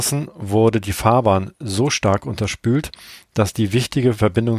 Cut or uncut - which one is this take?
uncut